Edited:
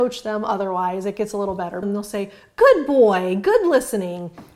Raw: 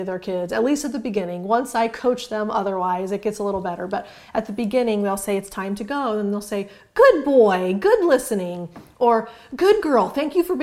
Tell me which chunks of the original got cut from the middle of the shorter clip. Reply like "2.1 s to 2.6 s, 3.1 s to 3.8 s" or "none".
3.9 s to 6.2 s